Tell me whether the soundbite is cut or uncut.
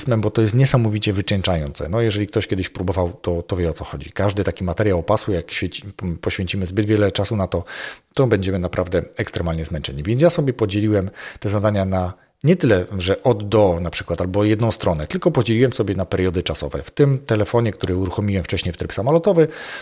uncut